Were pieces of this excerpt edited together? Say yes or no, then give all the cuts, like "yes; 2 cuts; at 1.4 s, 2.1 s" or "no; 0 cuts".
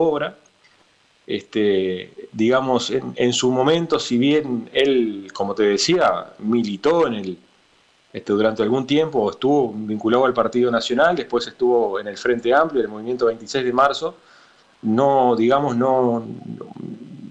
no; 0 cuts